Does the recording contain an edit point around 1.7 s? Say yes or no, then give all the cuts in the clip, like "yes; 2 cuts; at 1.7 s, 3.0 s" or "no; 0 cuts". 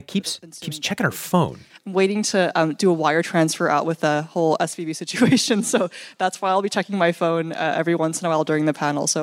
yes; 1 cut; at 1.7 s